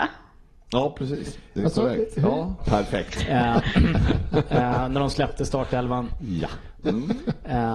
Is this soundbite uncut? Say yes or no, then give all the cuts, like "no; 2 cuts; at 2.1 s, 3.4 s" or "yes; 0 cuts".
no; 2 cuts; at 2.6 s, 6.8 s